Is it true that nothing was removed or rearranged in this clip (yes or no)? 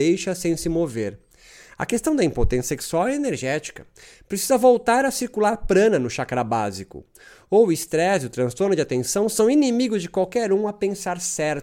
yes